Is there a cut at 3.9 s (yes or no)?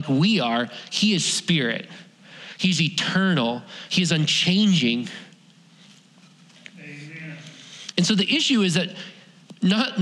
yes